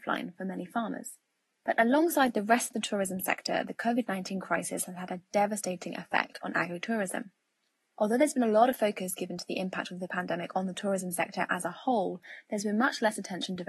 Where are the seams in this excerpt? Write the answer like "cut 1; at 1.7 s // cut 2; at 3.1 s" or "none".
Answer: none